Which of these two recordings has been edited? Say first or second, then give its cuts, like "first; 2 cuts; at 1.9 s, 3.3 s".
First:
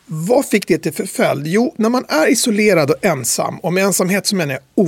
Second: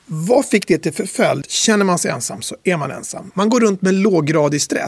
second; 2 cuts; at 1.4 s, 3.3 s